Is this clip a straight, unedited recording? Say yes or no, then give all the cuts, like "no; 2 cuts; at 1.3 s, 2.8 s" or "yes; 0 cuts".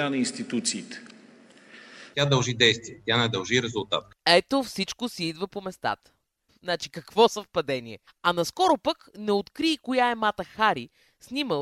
no; 3 cuts; at 2.1 s, 6.5 s, 8.1 s